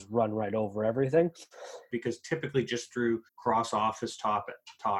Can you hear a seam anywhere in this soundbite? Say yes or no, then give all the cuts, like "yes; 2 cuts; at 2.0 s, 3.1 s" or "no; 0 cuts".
yes; 2 cuts; at 1.9 s, 3.3 s